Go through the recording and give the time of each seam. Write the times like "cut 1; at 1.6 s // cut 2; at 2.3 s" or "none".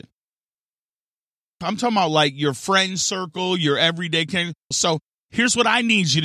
cut 1; at 1.6 s // cut 2; at 4.7 s